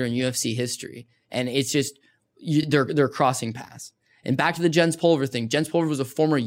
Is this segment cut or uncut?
uncut